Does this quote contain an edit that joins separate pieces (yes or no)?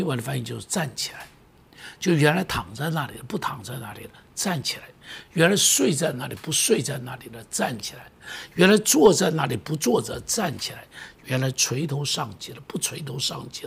no